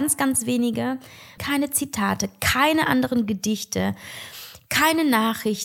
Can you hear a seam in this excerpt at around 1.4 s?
yes; 1 cut; at 1.4 s

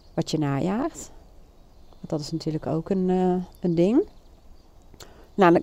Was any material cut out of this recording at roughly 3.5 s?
yes; 1 cut; at 3.5 s

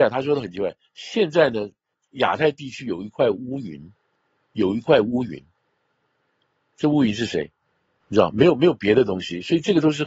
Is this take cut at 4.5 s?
no; 1 cut; at 8.0 s

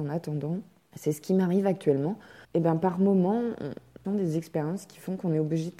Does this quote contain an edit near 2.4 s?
yes; 2 cuts; at 2.4 s, 4.0 s

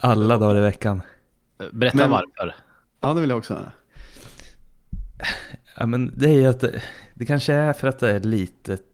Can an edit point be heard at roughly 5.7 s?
no; 0 cuts

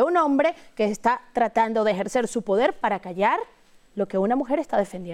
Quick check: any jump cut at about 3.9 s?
no; 0 cuts

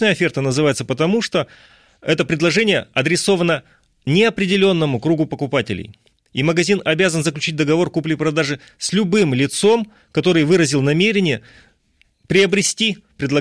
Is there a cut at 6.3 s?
no; 0 cuts

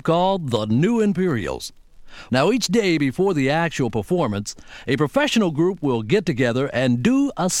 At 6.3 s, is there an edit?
no; 1 cut; at 2.3 s

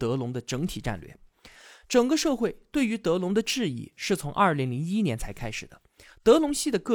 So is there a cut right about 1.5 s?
no; 0 cuts

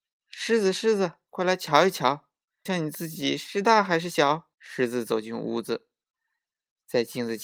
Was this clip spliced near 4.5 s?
yes; 2 cuts; at 2.7 s, 4.5 s

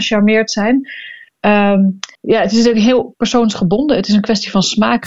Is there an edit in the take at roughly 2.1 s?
yes; 1 cut; at 2.1 s

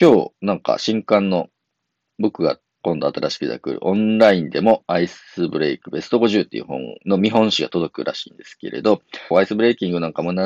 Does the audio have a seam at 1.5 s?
no; 2 cuts; at 2.8 s, 9.3 s

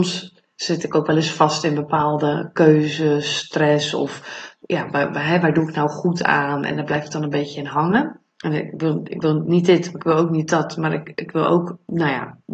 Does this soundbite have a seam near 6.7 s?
no; 1 cut; at 8.3 s

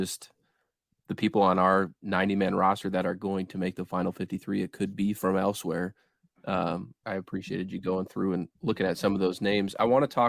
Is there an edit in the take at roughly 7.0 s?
yes; 2 cuts; at 7.0 s, 8.5 s

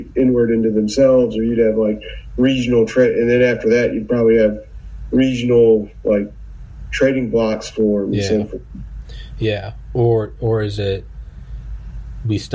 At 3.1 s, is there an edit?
no; 0 cuts

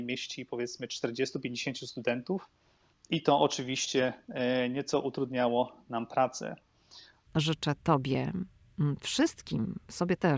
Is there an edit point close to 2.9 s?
yes; 2 cuts; at 2.9 s, 7.3 s

